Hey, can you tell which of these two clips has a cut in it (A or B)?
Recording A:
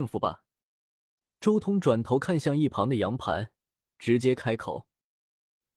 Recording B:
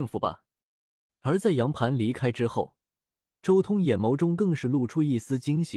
B